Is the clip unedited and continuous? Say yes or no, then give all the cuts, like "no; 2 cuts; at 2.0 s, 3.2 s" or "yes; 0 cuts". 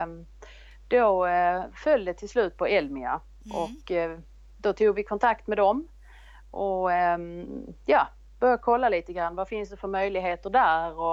yes; 0 cuts